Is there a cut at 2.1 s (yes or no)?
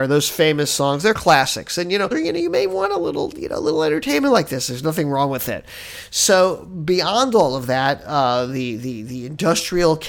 yes